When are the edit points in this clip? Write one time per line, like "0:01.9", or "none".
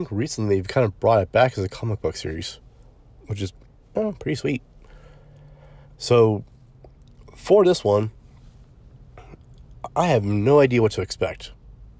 0:05.9